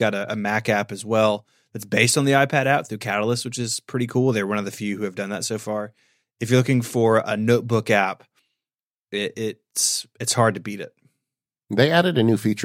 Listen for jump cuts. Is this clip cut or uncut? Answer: uncut